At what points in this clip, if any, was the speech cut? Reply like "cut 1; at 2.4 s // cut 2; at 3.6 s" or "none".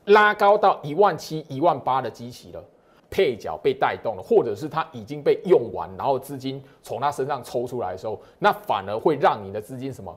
cut 1; at 3.0 s